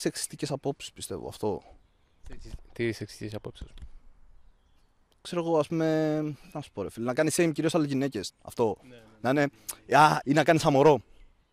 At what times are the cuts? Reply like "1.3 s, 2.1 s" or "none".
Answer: 8.3 s, 10.2 s